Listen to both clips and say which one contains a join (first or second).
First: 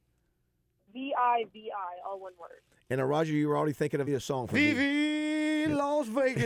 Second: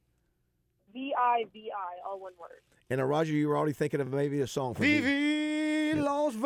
first